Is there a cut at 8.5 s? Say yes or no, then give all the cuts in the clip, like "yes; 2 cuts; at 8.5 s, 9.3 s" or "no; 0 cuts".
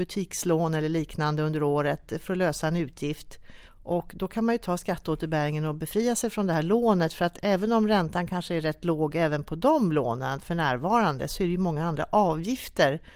no; 1 cut; at 3.7 s